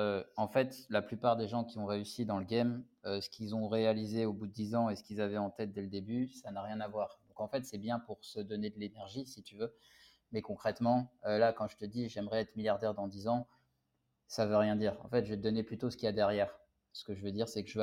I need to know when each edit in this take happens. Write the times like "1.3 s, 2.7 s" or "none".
16.9 s